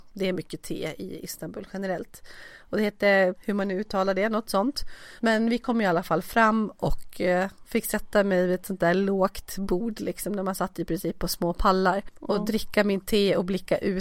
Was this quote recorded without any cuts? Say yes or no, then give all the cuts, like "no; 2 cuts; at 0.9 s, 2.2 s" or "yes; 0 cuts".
no; 2 cuts; at 3.3 s, 5.2 s